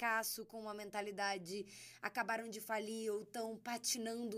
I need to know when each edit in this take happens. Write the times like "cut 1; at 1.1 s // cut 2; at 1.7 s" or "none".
none